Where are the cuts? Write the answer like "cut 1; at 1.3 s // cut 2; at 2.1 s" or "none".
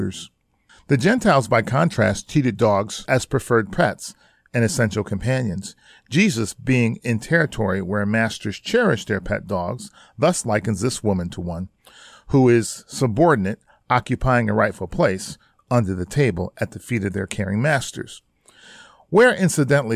none